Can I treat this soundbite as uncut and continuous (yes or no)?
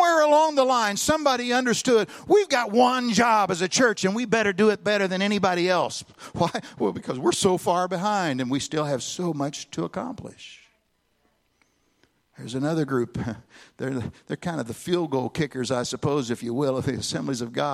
yes